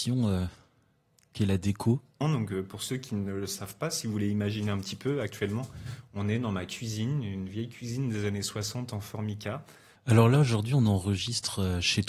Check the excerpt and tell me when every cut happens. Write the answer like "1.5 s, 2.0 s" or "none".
2.2 s, 10.0 s